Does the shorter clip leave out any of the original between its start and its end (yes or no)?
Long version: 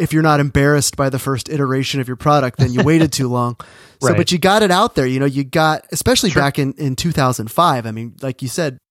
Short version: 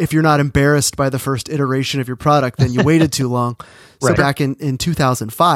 yes